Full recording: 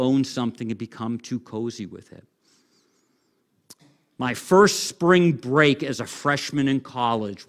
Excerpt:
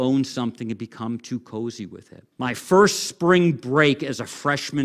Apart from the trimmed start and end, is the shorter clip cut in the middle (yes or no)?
yes